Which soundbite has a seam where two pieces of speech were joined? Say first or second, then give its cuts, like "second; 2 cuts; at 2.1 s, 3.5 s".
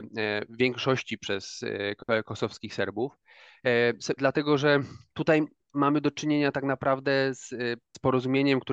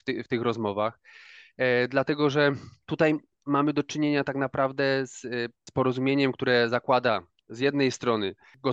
first; 1 cut; at 4.2 s